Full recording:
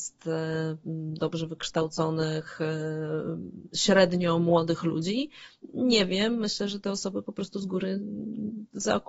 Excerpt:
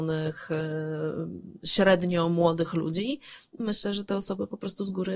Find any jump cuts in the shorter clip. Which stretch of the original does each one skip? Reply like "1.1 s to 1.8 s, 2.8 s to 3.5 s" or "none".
5.7 s to 6.4 s